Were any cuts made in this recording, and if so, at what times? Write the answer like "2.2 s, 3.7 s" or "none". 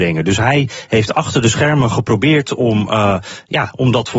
none